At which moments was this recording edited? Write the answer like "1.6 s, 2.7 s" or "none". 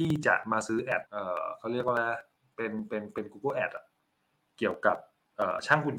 1.1 s